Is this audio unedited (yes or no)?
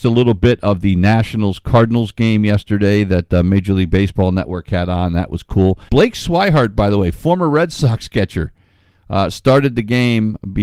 no